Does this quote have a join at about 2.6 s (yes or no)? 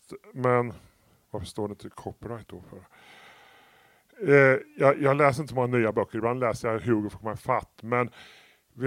no